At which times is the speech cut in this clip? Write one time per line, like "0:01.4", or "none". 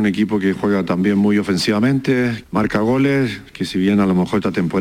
0:02.4